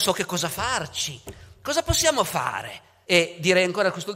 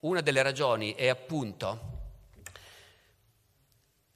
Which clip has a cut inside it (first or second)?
first